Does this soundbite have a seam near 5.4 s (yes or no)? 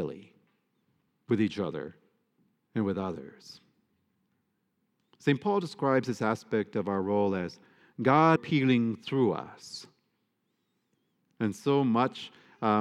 no